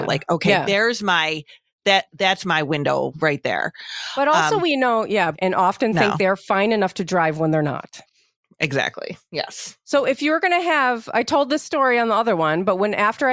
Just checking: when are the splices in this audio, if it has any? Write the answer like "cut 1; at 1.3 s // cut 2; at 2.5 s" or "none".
cut 1; at 5.3 s